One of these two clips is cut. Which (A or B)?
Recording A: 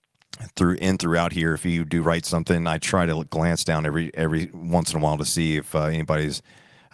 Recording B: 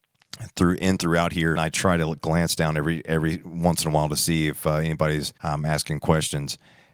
B